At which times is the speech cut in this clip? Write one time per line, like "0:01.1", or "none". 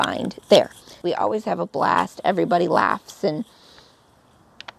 0:01.0